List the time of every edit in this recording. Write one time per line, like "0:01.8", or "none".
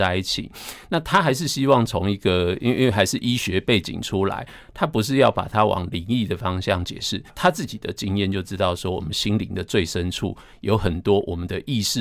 0:07.3